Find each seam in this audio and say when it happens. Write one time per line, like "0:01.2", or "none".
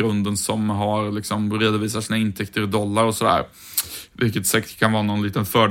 none